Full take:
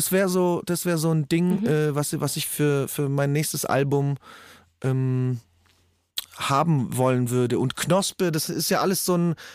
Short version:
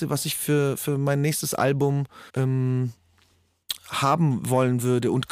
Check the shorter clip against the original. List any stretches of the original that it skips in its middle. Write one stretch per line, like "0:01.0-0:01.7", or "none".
0:04.4-0:04.8

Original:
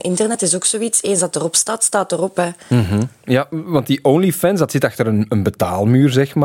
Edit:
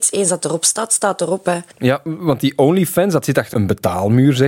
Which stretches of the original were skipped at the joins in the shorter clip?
0:02.6-0:03.2
0:05.0-0:05.3

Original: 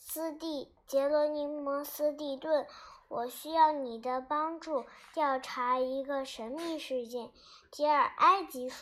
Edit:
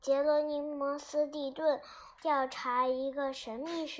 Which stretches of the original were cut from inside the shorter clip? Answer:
0:03.0-0:05.1

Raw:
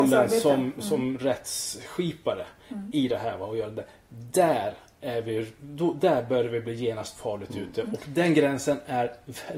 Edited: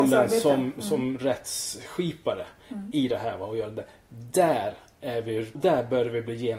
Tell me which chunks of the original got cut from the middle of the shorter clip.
0:05.5-0:05.9

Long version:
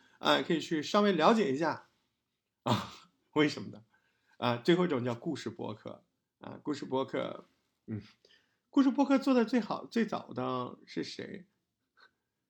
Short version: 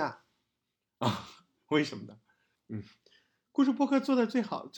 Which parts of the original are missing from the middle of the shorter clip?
0:04.2-0:07.7

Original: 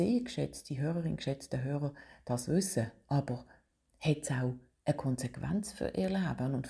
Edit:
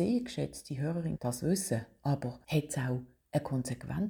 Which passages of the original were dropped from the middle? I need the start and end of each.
0:01.2-0:02.2
0:03.5-0:04.0

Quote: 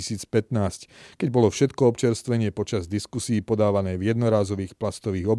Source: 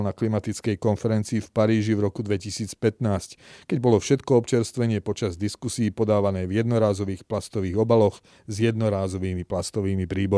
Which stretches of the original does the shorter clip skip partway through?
none

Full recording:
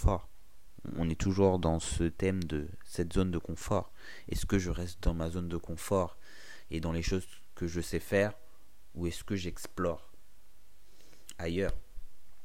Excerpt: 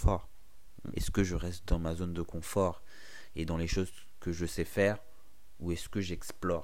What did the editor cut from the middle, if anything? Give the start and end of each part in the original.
0:00.9-0:04.3

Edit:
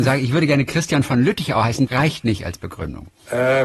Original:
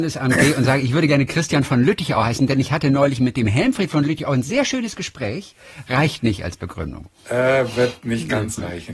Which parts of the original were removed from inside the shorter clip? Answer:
0:02.5-0:05.8

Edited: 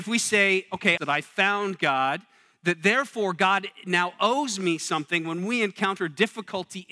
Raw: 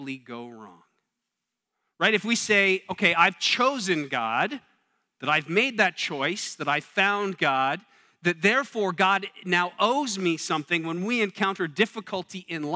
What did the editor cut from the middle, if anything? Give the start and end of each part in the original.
0:03.1-0:06.6

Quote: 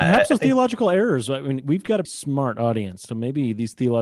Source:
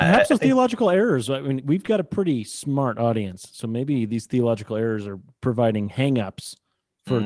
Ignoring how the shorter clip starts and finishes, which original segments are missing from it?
0:02.0-0:02.4
0:03.5-0:03.6

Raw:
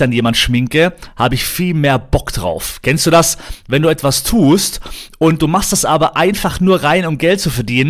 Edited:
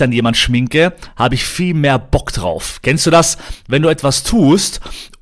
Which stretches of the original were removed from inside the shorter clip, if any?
none

